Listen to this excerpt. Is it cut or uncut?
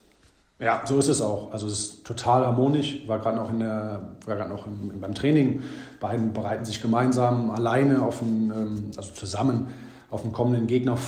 uncut